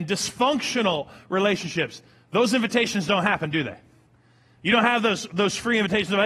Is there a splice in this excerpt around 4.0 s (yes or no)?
no